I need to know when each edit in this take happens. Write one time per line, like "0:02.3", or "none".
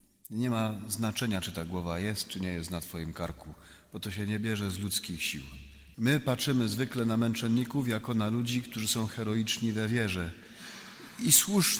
0:05.9